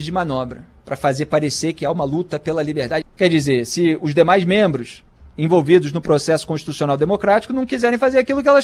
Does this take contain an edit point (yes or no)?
yes